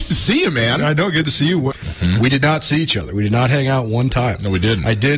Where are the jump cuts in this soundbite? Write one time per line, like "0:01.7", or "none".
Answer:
0:01.7

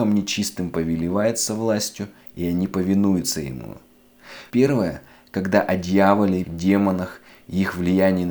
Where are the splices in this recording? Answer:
0:04.5
0:06.4

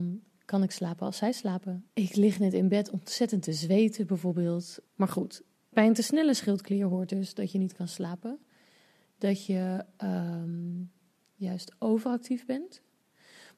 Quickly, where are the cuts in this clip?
0:01.9
0:04.8

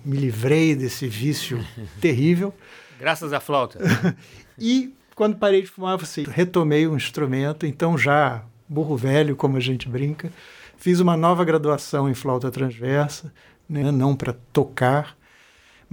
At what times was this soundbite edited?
0:06.2
0:13.8

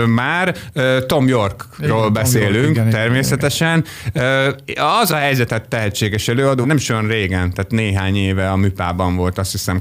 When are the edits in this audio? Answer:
0:05.5
0:06.6

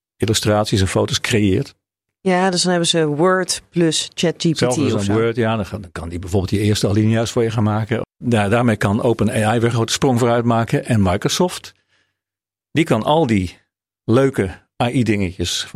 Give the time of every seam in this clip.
0:02.1
0:08.0

